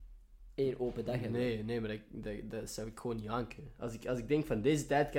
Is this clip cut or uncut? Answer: uncut